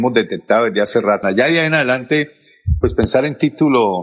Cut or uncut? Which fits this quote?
cut